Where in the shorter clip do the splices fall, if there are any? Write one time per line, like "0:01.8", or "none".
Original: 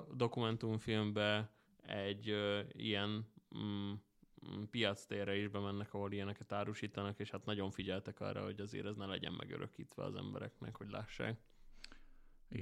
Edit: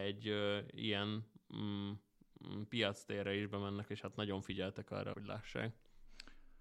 0:03.9
0:05.1